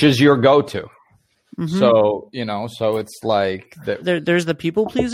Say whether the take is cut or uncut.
cut